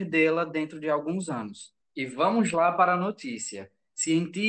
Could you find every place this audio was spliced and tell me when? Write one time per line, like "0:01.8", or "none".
0:01.8

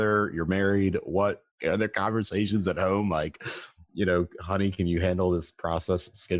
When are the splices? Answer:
none

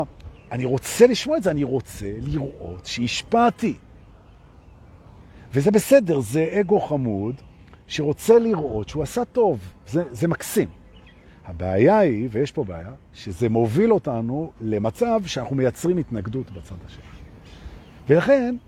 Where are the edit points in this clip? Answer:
none

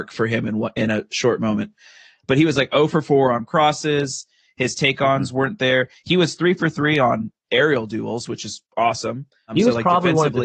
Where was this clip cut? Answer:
none

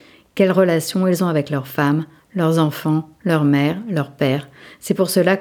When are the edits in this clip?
none

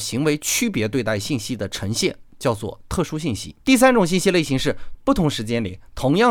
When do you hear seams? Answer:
0:03.6
0:04.9

